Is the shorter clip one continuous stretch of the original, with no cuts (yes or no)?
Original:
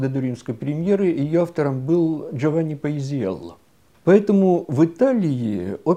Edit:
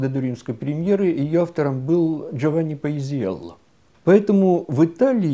yes